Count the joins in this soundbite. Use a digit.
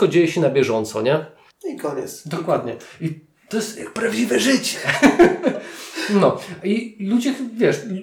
1